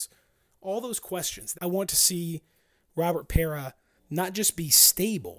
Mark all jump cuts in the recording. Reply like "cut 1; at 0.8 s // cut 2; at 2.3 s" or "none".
cut 1; at 1.5 s // cut 2; at 4.0 s